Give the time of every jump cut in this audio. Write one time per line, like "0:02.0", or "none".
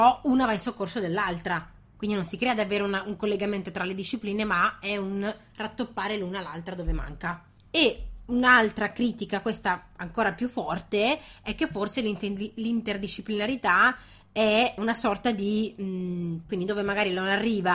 0:07.7
0:14.8
0:16.5